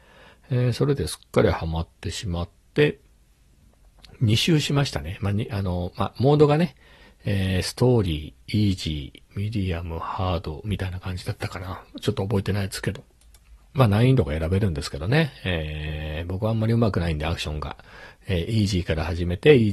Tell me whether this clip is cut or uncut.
uncut